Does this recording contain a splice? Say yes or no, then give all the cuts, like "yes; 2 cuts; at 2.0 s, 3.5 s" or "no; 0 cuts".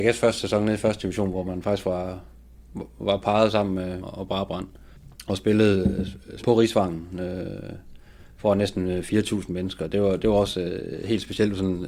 yes; 2 cuts; at 4.0 s, 6.4 s